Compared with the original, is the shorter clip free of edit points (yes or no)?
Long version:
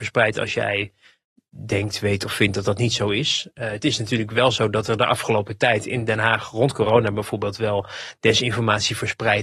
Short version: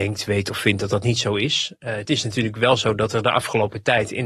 yes